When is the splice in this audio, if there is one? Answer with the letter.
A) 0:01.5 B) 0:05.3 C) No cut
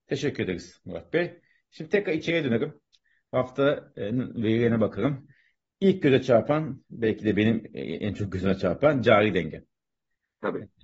C